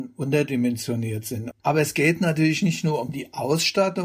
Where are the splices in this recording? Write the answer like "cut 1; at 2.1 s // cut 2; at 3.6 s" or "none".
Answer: cut 1; at 1.5 s